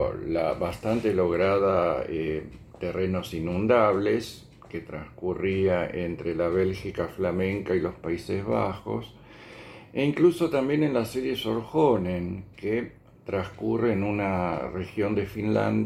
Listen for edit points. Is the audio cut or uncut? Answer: uncut